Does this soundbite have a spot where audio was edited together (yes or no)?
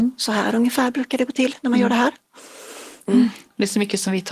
yes